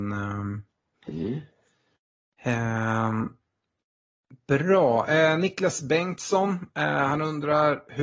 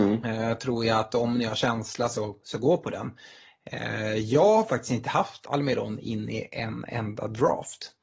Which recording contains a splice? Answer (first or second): first